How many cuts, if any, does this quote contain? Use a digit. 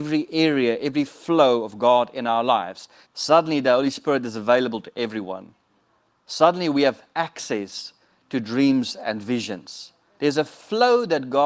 2